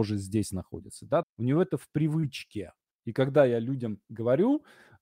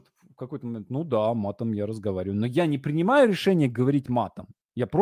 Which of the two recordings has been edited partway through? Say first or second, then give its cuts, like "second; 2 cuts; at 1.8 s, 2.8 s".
first; 2 cuts; at 1.2 s, 2.9 s